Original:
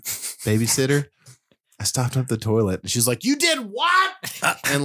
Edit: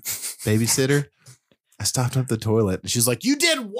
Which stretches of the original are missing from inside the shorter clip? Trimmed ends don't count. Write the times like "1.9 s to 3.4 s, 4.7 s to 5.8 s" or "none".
none